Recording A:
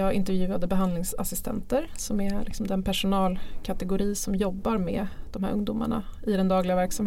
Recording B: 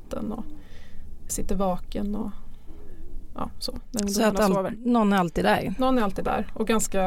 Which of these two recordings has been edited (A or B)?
B